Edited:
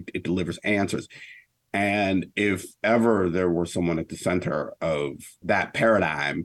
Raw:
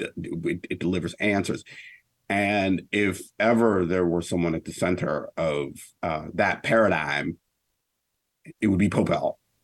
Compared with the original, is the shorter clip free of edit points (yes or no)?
no